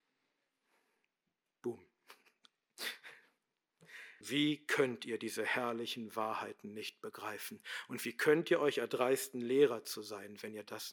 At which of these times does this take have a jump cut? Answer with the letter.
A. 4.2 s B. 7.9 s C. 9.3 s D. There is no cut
A